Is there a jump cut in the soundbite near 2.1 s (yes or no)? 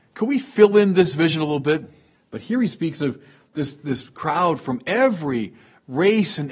yes